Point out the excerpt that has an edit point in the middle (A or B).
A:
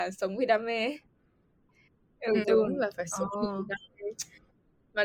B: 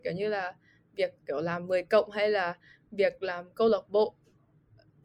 A